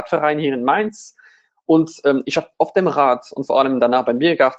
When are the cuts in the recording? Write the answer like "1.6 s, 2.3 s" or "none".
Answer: none